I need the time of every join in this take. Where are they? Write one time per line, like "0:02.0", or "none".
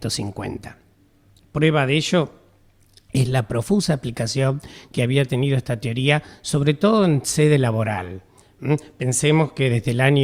none